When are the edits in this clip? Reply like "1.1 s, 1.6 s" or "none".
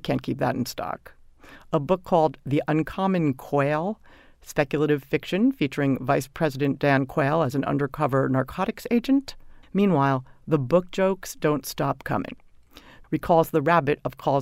9.6 s, 13.0 s